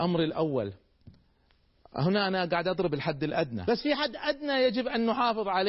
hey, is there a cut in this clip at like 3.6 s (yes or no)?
yes